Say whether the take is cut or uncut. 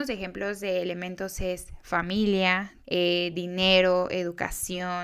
cut